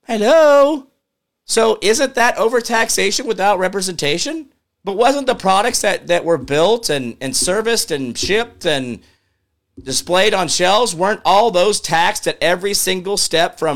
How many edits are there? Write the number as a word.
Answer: one